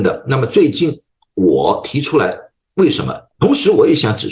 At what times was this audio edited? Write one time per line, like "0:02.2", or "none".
0:03.3